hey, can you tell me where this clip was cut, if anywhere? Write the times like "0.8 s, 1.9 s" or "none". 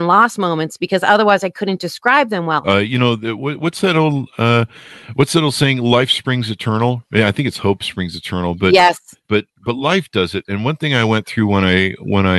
2.6 s